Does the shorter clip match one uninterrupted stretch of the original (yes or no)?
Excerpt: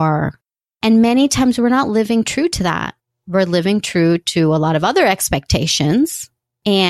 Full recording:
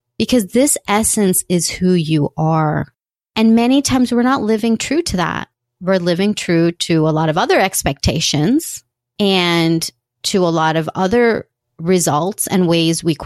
yes